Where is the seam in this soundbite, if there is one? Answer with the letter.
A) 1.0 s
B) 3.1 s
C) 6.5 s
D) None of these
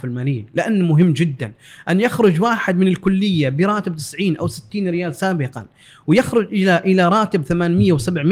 D